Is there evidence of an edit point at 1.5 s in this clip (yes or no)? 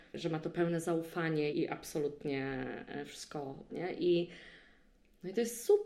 yes